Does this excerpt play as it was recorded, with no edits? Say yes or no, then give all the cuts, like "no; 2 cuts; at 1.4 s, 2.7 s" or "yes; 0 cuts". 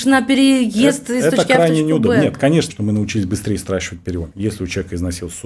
no; 2 cuts; at 2.7 s, 4.3 s